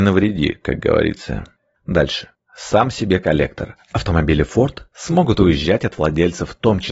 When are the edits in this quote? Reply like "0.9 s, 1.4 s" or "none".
none